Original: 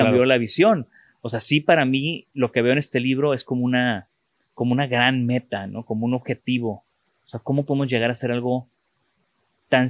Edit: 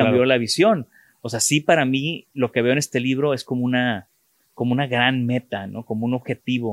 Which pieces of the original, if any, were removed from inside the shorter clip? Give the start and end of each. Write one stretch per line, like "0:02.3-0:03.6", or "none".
none